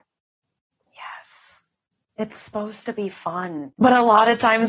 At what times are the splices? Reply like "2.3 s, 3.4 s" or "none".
3.7 s

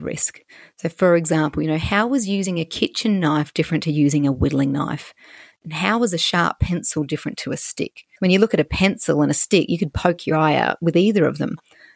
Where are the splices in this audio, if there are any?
none

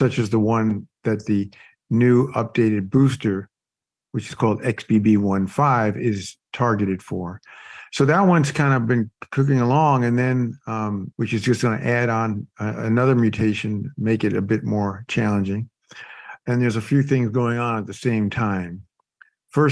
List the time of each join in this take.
11.1 s, 16.4 s

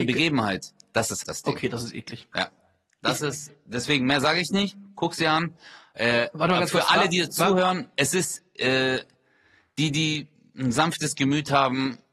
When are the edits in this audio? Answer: 1.2 s

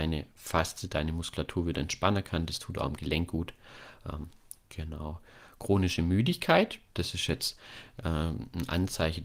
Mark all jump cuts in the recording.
none

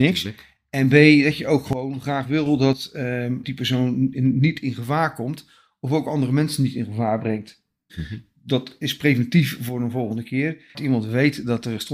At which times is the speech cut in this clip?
3.4 s, 7.9 s, 10.7 s

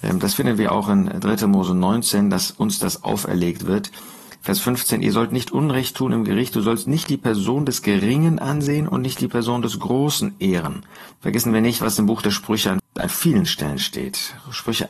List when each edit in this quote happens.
11.1 s, 12.8 s

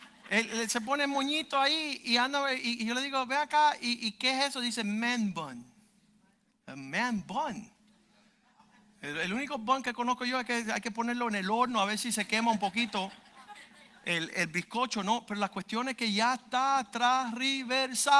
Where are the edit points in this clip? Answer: none

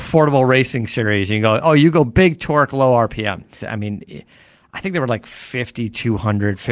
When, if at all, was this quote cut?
3.6 s

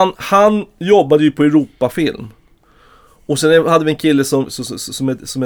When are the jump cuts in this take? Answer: 4.5 s

